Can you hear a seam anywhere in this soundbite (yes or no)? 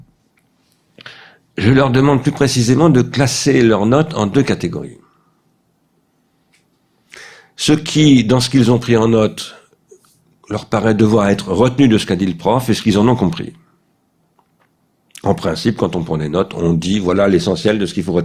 no